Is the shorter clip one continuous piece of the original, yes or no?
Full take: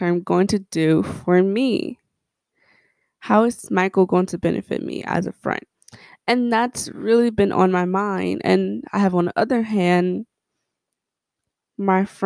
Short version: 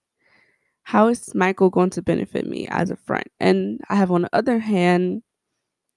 no